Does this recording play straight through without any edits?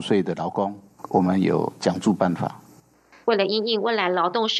no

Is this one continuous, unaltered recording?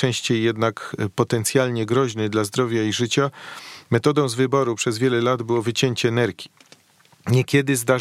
yes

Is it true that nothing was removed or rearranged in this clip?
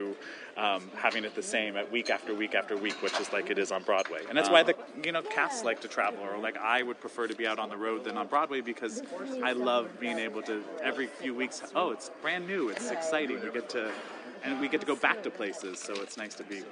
yes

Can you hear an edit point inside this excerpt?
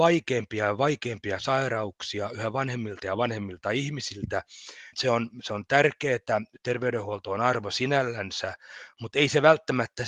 yes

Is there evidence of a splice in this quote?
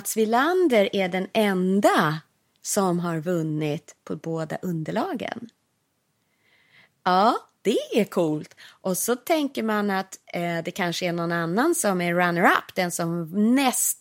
no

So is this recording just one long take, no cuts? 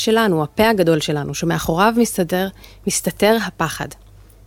yes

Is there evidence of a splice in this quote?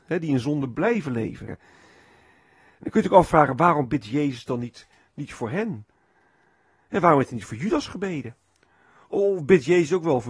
yes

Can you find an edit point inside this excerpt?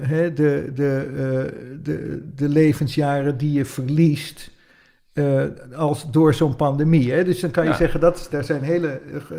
yes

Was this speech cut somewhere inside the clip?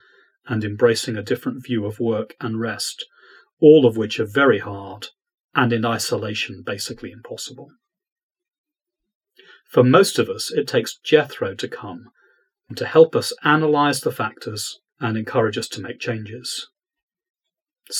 yes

